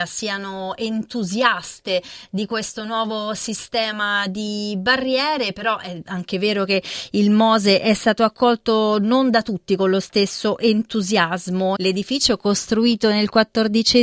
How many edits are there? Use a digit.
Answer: 1